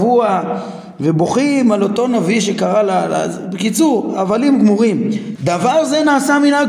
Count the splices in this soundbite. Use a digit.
1